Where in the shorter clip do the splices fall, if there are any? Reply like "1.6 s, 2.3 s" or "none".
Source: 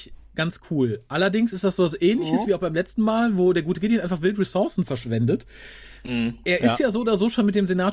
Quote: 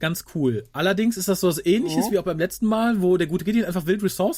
none

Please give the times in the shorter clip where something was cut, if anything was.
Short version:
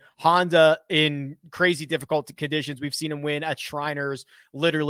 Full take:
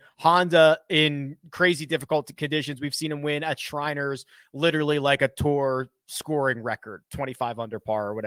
none

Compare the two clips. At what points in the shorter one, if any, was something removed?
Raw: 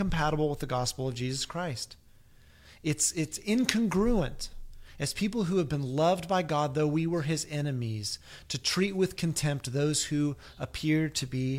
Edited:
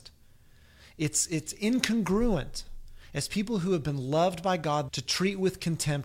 4.9 s

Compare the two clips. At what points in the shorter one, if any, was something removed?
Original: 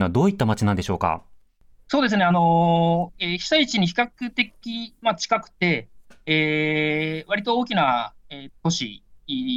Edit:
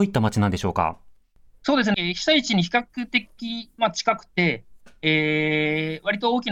1.9 s

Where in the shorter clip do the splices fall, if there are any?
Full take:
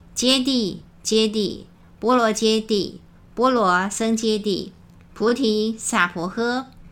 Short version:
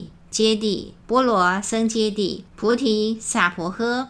1.0 s, 2.5 s

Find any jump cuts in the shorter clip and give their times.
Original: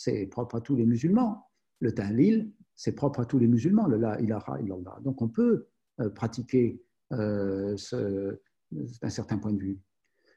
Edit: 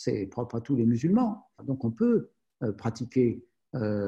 1.6 s

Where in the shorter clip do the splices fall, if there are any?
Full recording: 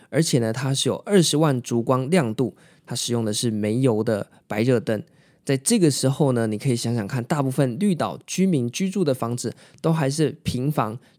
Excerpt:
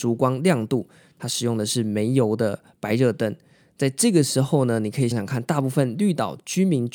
5.1 s

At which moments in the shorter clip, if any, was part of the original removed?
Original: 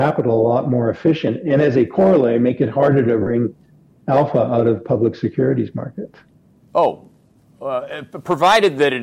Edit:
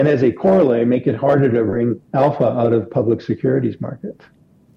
2.0 s

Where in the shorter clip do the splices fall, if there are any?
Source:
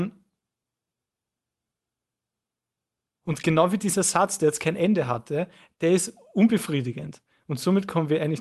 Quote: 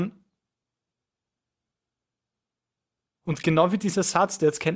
none

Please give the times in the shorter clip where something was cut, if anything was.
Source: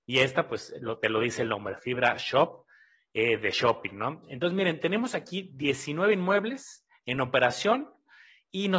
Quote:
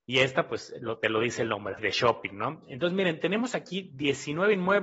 1.8 s

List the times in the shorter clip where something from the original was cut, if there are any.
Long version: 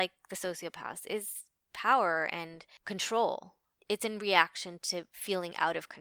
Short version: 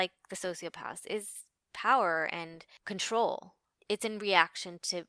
none

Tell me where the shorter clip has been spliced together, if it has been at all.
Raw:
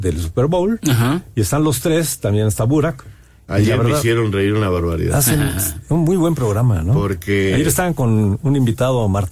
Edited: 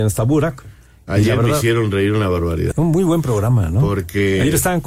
2.7 s

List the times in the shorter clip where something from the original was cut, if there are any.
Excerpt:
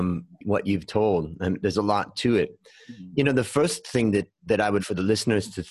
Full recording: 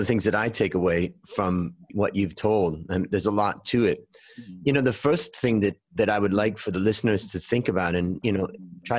4.8 s

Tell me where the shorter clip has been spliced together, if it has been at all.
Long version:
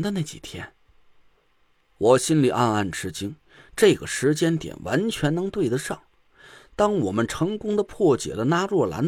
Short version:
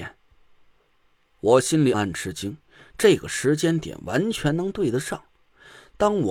1.9 s

